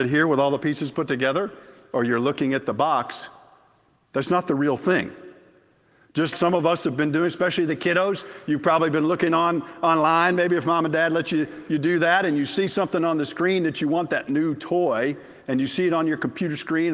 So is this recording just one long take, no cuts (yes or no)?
no